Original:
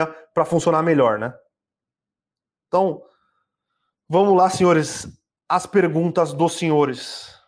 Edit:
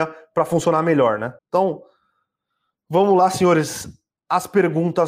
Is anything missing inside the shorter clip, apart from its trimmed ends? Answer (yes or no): yes